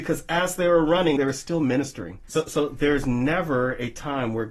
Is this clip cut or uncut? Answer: cut